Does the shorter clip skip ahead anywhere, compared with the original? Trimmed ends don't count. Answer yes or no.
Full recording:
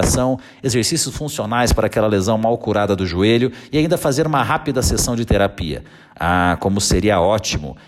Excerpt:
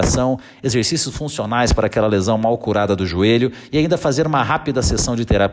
no